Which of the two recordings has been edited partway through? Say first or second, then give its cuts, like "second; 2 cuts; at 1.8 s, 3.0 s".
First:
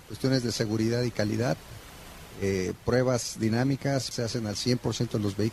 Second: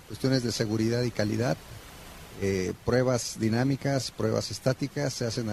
first; 1 cut; at 4.1 s